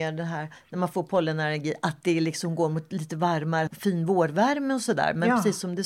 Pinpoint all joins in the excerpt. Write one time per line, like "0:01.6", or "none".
0:03.7